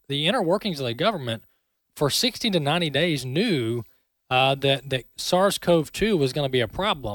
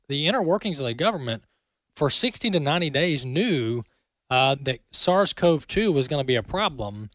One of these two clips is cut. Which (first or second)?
second